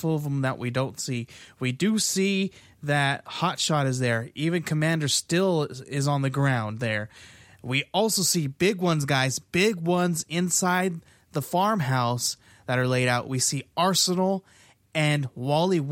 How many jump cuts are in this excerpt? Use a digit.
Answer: 0